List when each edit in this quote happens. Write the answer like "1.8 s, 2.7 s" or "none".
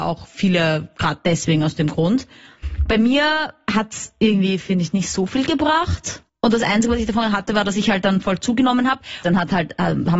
6.3 s, 9.2 s